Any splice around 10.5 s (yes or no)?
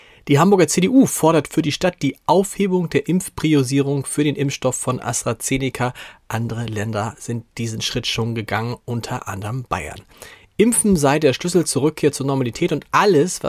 no